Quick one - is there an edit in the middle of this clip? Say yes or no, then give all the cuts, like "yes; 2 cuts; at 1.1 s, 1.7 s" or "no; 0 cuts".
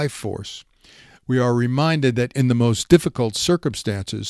yes; 1 cut; at 2.3 s